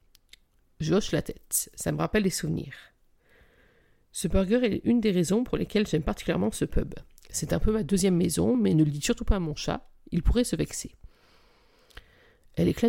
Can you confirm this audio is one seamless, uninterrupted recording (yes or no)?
yes